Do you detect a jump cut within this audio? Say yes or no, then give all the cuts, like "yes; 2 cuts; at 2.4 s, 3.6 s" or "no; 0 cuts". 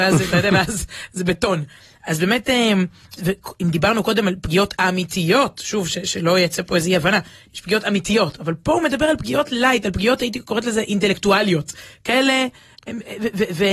yes; 1 cut; at 3.2 s